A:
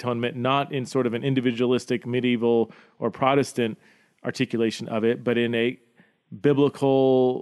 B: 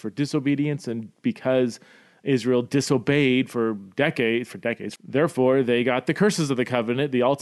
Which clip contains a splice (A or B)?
B